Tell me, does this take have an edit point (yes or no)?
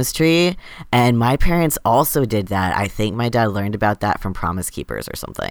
no